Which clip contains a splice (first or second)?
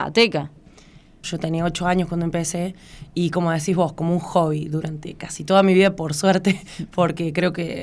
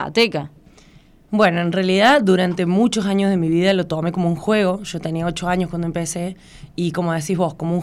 first